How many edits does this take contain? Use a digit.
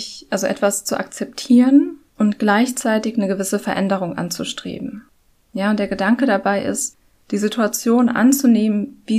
0